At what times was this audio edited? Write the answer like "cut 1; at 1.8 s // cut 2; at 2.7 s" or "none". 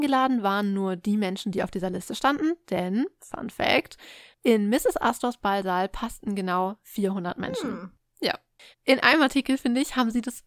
cut 1; at 8.7 s